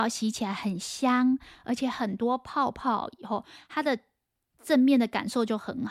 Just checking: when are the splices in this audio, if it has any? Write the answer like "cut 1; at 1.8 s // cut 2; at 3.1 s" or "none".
none

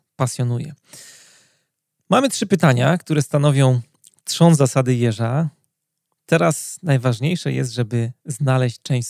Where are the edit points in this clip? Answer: none

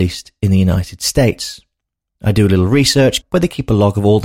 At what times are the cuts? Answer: cut 1; at 3.2 s

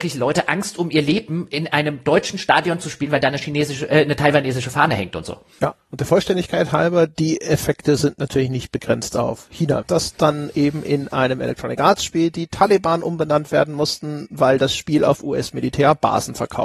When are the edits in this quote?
cut 1; at 5.6 s // cut 2; at 9.8 s

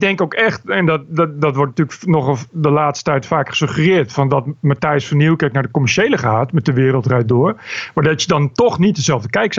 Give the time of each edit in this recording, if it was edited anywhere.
none

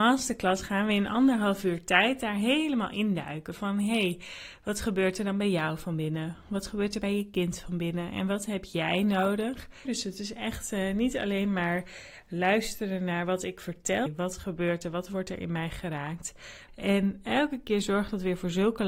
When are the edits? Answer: cut 1; at 9.8 s // cut 2; at 14.1 s // cut 3; at 16.7 s

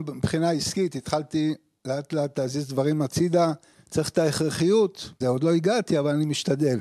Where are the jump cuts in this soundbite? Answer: cut 1; at 3.7 s // cut 2; at 5.2 s

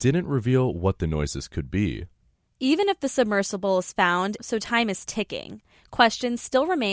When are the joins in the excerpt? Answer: cut 1; at 4.4 s

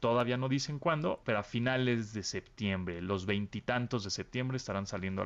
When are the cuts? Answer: cut 1; at 1.2 s

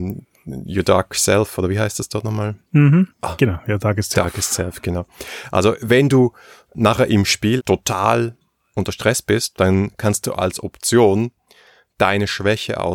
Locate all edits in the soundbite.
cut 1; at 3.1 s // cut 2; at 7.6 s // cut 3; at 9.5 s

